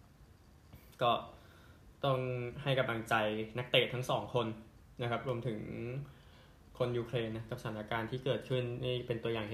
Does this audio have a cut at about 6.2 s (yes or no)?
no